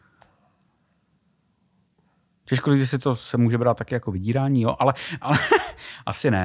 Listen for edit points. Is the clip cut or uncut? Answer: uncut